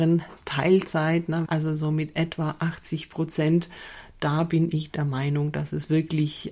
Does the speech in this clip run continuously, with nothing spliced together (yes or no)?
no